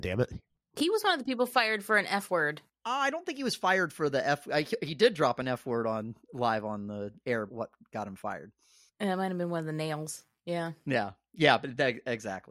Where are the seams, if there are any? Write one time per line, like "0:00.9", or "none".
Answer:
0:07.5